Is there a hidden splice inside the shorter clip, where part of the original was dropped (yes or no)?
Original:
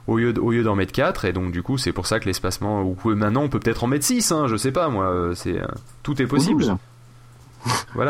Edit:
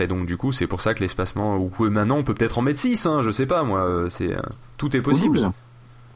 no